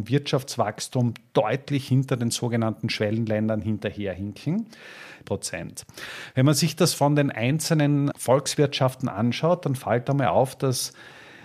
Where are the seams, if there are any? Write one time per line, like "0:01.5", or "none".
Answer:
0:05.2
0:08.1

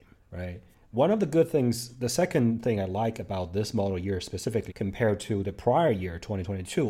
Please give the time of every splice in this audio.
0:04.7

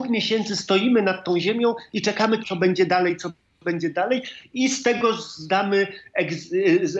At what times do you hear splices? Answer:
0:02.4

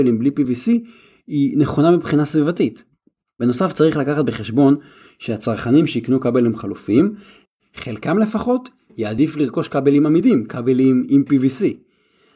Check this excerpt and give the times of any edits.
none

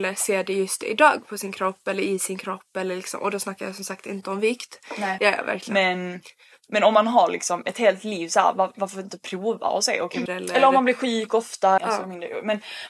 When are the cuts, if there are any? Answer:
0:05.2
0:10.3
0:11.8

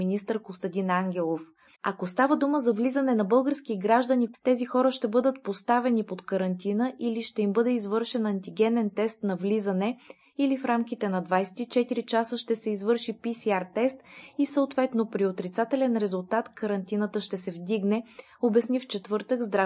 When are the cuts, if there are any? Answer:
0:01.7
0:04.3

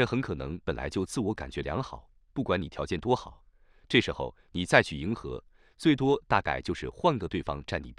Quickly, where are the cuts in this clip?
none

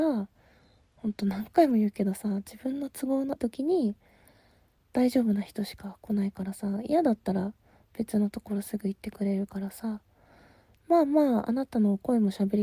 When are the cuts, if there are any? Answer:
0:03.4

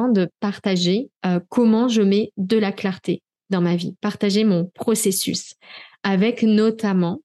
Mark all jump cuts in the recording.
0:01.2

